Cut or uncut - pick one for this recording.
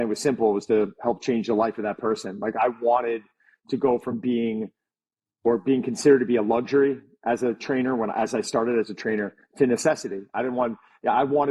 uncut